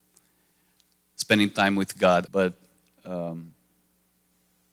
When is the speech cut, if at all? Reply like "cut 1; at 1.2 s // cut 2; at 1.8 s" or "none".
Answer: cut 1; at 2.3 s

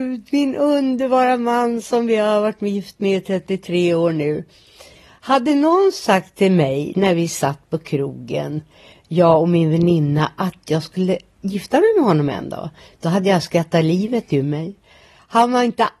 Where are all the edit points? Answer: none

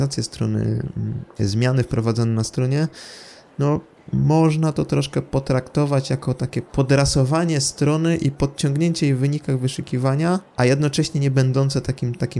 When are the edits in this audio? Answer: none

